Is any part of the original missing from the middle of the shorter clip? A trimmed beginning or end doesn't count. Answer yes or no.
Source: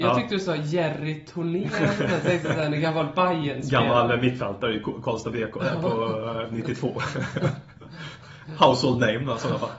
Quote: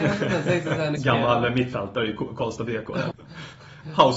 yes